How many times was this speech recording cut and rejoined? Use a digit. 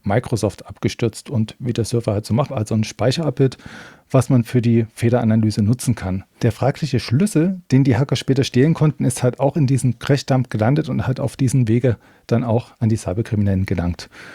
1